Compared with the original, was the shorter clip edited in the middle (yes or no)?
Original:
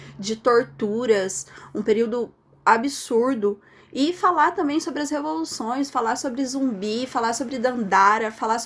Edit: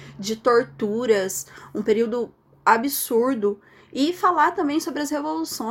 no